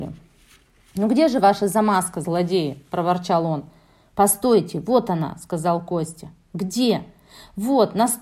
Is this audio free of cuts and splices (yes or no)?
yes